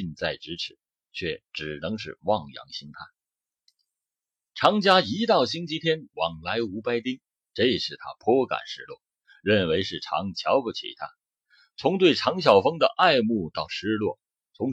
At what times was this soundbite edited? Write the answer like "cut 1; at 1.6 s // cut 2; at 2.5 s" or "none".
cut 1; at 6.1 s // cut 2; at 7.5 s